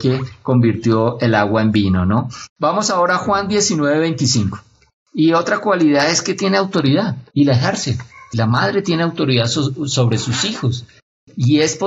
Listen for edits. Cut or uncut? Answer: cut